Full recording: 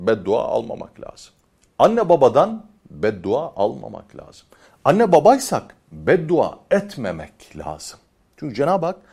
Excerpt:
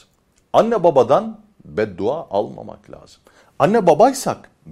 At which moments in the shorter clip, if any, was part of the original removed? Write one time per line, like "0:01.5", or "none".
none